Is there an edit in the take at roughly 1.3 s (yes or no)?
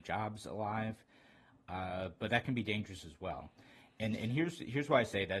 no